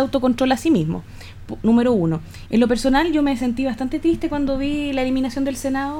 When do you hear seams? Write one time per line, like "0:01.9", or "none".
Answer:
0:02.5